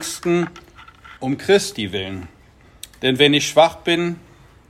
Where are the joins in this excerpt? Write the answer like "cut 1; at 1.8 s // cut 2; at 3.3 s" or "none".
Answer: cut 1; at 1.2 s